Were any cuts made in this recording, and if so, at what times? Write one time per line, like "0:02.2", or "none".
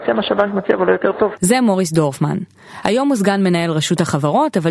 none